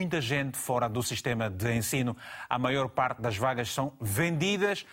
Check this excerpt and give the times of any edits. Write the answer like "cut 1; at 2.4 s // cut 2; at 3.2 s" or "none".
none